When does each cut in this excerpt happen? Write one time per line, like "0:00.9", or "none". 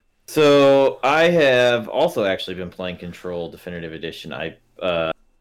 none